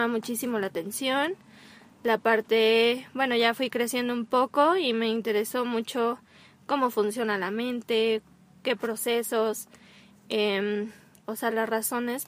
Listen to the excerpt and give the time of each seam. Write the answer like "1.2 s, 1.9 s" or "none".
11.2 s